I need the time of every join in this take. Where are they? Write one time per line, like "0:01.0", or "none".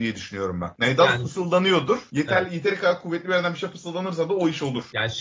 none